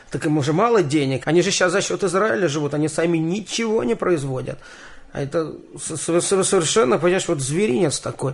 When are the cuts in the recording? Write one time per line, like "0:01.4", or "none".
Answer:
0:01.2